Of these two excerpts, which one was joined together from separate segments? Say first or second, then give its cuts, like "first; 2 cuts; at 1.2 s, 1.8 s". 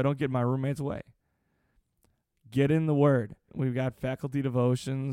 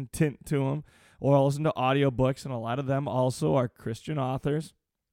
first; 1 cut; at 3.5 s